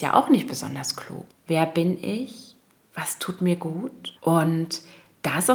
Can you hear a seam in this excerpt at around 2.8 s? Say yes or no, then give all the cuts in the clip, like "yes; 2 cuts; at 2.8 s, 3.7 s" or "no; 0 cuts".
no; 2 cuts; at 1.3 s, 4.1 s